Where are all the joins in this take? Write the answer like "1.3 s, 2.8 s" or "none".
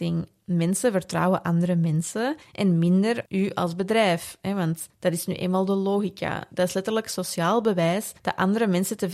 6.5 s